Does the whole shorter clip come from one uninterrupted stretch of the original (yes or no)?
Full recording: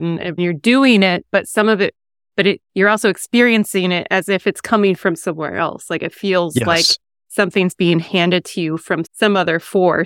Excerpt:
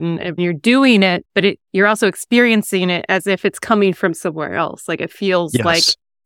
no